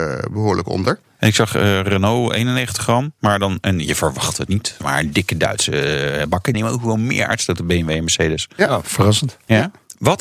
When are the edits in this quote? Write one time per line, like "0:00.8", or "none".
0:06.5